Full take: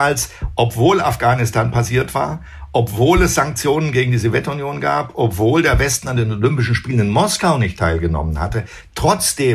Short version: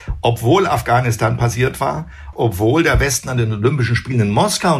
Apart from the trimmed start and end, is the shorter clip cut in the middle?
yes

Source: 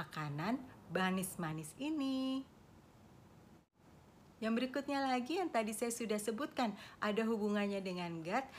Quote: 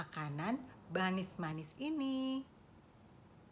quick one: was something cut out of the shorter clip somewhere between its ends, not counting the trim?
no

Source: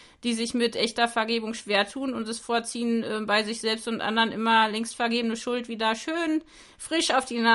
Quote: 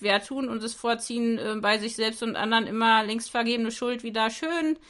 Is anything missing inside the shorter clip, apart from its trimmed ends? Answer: no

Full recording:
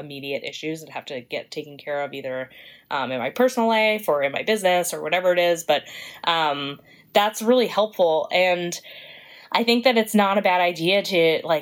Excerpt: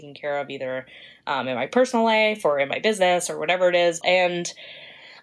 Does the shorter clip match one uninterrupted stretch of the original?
no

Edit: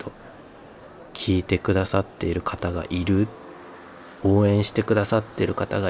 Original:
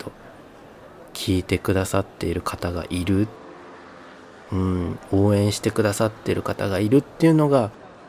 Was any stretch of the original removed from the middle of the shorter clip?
yes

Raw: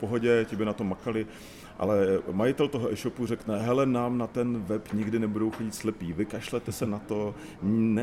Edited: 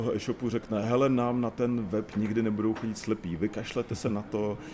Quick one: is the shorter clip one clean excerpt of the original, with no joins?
yes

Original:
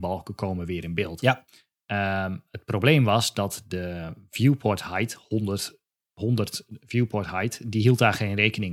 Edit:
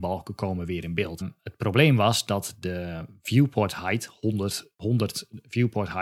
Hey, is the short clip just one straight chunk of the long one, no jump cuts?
no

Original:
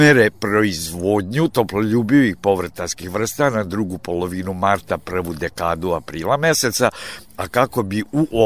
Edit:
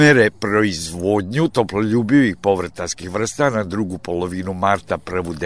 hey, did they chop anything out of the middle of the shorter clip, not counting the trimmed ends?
no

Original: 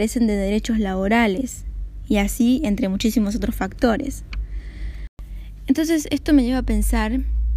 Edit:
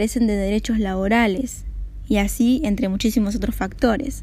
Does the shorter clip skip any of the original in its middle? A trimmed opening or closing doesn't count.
no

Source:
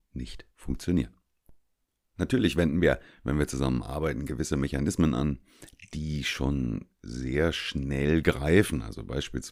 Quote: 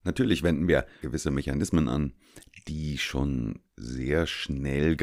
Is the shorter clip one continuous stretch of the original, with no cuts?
no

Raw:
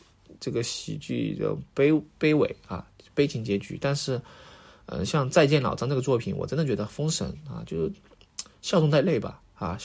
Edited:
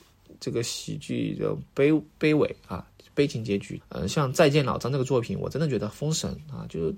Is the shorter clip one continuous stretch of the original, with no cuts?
no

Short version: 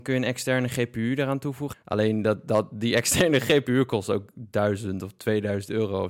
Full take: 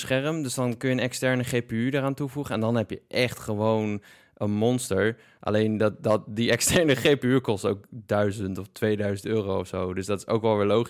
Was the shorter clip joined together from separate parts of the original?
yes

